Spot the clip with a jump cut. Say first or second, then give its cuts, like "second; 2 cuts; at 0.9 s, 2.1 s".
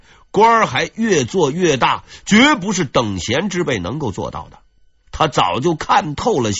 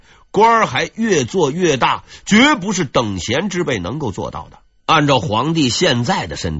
second; 1 cut; at 4.8 s